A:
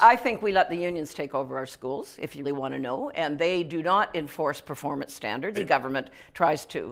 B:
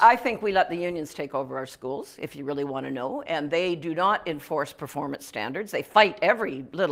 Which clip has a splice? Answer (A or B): A